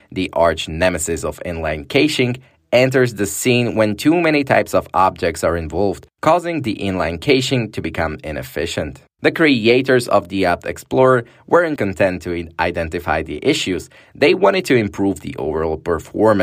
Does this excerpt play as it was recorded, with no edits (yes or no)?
no